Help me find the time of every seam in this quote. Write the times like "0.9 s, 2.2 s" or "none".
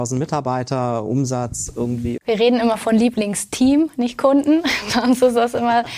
2.2 s